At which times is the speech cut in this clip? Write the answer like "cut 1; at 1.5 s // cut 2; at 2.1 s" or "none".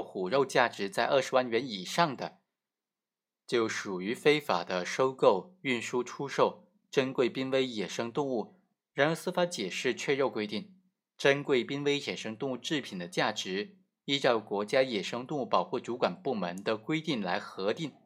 cut 1; at 8.8 s